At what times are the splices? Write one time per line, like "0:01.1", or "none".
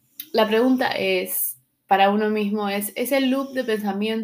0:01.8